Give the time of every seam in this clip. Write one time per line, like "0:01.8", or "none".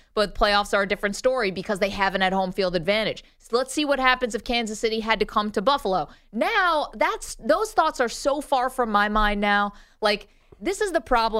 none